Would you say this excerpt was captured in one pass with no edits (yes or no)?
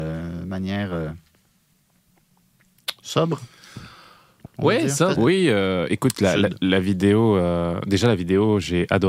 no